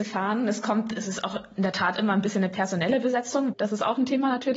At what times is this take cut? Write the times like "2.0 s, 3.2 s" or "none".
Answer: 3.5 s